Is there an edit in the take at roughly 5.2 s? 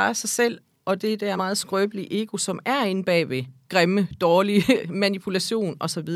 no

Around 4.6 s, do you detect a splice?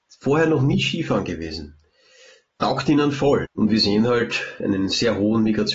yes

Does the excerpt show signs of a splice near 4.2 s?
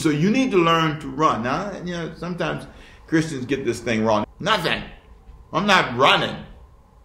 yes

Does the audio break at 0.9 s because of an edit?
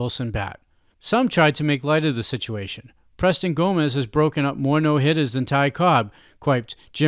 yes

